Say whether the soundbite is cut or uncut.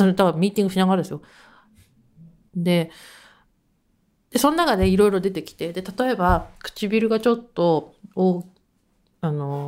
cut